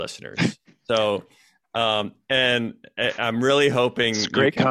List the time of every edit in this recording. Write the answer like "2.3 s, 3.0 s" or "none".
none